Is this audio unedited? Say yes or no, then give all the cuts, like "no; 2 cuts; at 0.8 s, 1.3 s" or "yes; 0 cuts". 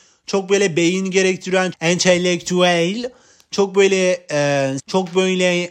no; 2 cuts; at 1.7 s, 4.8 s